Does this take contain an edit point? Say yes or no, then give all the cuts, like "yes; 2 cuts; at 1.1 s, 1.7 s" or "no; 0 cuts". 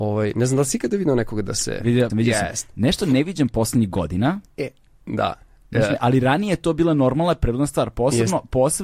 yes; 1 cut; at 2.1 s